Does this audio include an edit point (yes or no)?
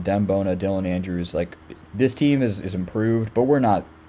yes